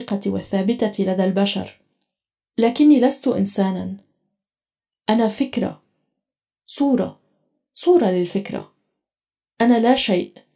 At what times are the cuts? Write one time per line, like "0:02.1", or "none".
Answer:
none